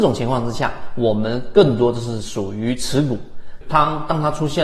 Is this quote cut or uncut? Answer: cut